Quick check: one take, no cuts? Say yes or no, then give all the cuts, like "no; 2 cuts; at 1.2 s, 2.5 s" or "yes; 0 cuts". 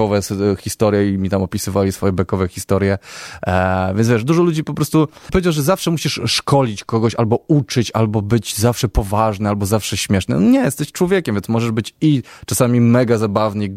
no; 1 cut; at 5.3 s